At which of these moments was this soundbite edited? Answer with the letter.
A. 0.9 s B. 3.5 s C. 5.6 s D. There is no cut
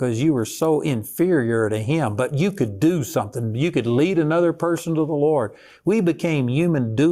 D